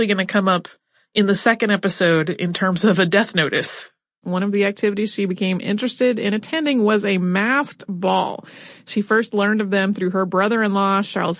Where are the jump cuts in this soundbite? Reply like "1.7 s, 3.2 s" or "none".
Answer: 4.2 s